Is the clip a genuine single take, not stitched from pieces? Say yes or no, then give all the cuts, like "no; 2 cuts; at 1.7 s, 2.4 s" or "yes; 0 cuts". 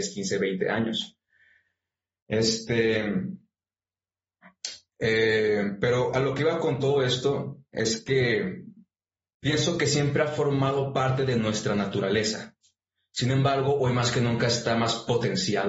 yes; 0 cuts